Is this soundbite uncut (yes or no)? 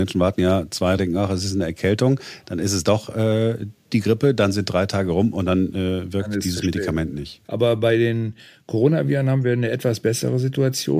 no